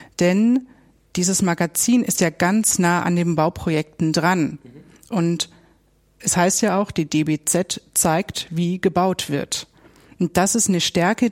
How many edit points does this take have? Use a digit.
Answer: 0